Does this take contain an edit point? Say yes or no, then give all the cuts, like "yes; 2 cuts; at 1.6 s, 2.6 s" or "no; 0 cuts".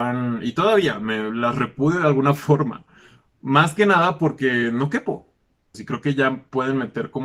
yes; 1 cut; at 5.7 s